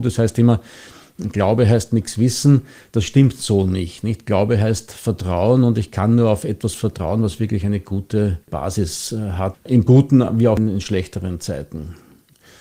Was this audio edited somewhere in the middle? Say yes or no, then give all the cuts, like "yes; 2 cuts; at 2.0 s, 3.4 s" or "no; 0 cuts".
yes; 2 cuts; at 8.4 s, 9.5 s